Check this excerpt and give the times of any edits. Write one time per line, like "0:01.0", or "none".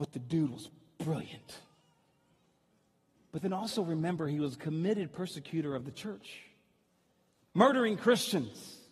none